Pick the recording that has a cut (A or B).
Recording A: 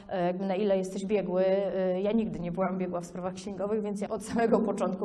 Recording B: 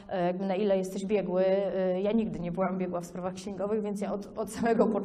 A